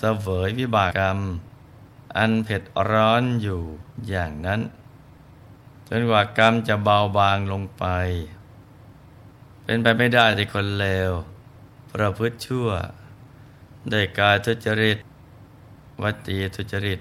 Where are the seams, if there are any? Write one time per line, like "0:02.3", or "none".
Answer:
0:00.9